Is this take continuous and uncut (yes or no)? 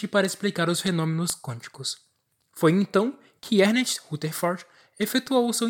no